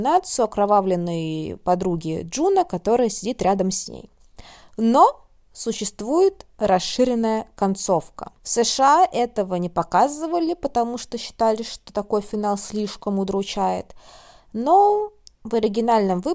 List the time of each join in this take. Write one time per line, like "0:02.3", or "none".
none